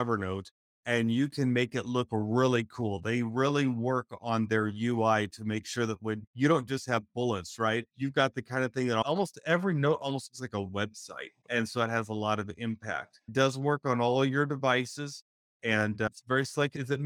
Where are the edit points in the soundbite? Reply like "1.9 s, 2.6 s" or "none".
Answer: 11.4 s